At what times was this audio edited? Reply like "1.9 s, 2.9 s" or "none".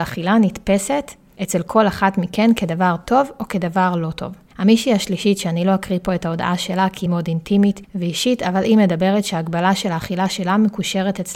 7.1 s